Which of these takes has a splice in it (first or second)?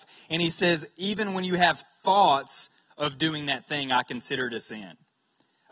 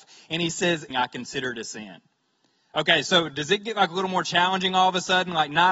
second